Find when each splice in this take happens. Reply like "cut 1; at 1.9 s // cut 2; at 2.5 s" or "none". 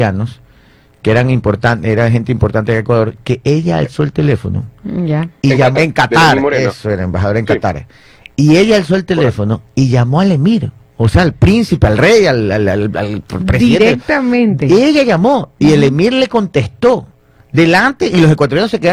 cut 1; at 5.7 s